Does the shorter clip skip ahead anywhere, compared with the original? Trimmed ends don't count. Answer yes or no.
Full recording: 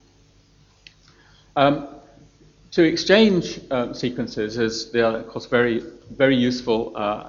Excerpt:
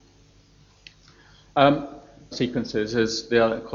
yes